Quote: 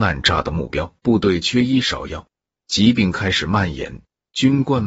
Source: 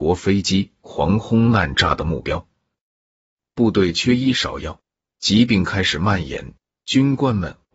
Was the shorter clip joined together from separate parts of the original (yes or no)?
yes